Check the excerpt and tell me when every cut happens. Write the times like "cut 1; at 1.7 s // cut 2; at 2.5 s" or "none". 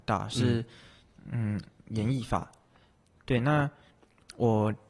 cut 1; at 3.2 s